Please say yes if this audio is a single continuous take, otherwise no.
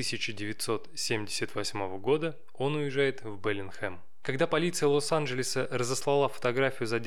yes